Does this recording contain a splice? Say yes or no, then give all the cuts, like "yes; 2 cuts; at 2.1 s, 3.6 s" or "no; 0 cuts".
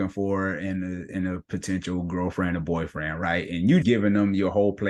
yes; 1 cut; at 3.8 s